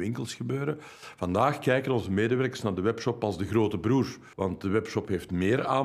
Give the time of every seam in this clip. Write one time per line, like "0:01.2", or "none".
0:04.3